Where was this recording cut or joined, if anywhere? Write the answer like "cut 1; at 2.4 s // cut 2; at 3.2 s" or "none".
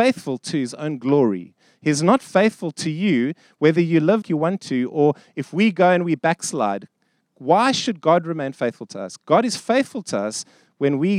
cut 1; at 4.2 s